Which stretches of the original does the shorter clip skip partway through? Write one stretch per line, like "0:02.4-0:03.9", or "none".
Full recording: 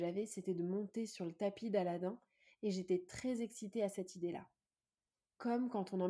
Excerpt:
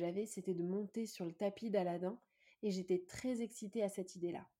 none